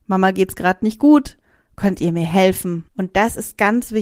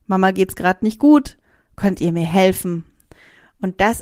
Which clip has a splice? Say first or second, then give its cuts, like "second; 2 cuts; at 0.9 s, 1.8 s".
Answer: first; 1 cut; at 2.9 s